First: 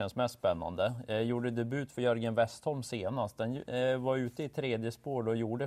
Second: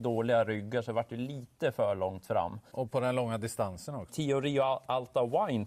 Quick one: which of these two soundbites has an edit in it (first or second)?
second